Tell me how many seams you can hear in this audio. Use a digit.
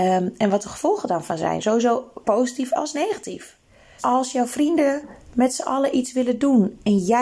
2